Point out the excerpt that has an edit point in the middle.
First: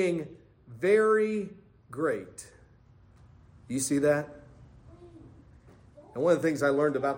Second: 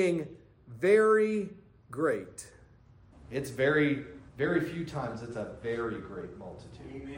second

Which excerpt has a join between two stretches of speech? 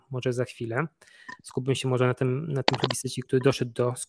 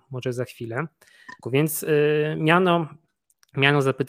second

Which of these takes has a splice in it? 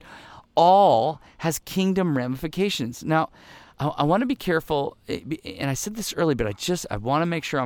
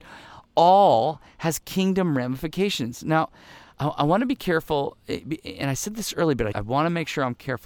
second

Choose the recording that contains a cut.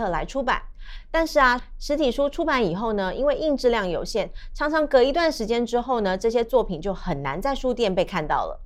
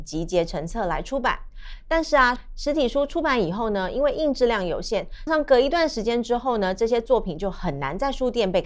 second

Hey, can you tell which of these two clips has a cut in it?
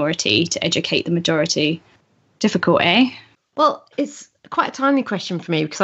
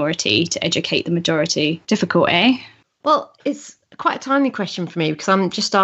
second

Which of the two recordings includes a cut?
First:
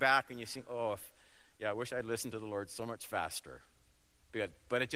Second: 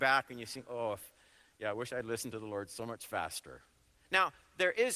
second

